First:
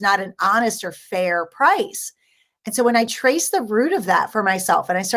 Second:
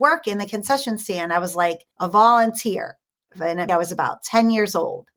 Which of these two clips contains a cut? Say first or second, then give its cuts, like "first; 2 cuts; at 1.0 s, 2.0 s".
second; 2 cuts; at 1.9 s, 3.7 s